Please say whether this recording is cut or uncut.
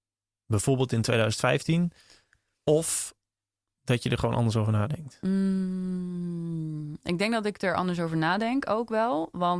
uncut